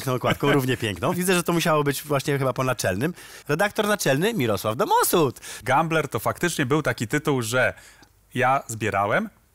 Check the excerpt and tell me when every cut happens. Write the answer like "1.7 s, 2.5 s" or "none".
3.4 s